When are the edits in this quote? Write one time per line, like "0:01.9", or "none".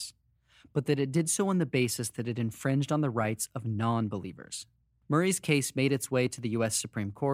0:05.0